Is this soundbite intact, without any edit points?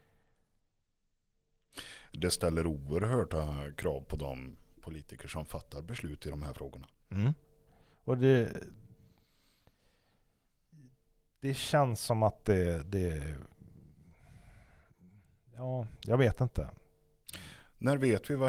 yes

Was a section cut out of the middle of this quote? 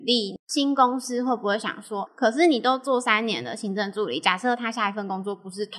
yes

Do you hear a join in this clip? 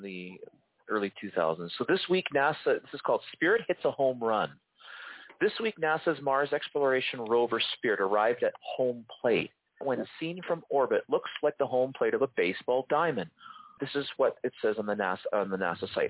yes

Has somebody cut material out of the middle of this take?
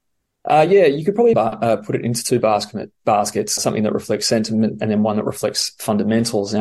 yes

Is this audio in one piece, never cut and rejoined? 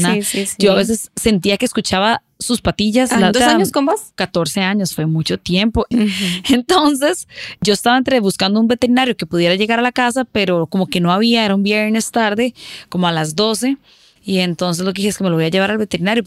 no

